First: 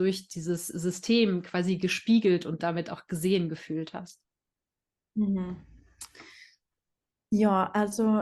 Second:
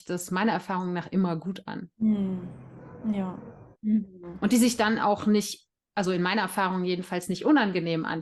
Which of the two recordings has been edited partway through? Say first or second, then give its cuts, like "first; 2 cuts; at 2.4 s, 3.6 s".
second; 2 cuts; at 1.9 s, 3.7 s